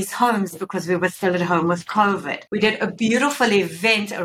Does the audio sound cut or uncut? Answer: cut